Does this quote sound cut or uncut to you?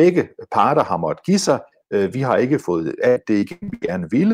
uncut